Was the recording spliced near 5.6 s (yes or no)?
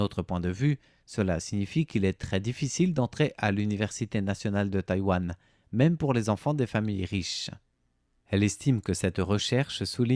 no